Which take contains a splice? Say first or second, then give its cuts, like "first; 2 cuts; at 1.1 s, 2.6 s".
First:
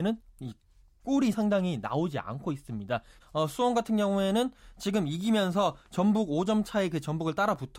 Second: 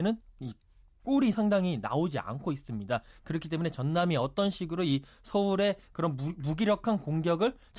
first; 1 cut; at 3.2 s